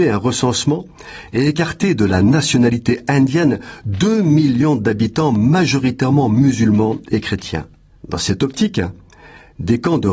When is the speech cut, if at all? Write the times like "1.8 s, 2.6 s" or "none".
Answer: 8.0 s